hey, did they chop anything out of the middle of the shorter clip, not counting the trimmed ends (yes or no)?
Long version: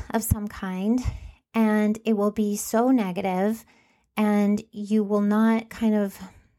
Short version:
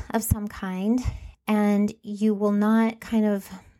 yes